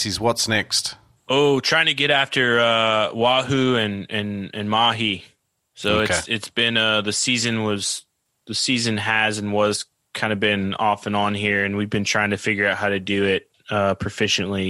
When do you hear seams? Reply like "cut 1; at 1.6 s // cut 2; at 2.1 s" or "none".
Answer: none